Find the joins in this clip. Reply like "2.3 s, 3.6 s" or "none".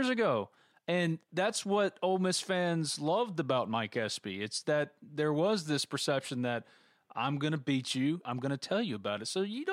8.2 s